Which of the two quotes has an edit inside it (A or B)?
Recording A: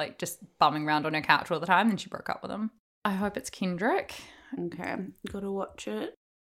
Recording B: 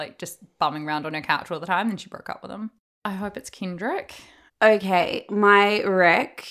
B